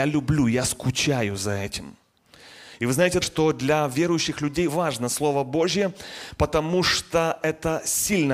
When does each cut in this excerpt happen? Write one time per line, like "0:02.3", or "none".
0:03.2
0:04.7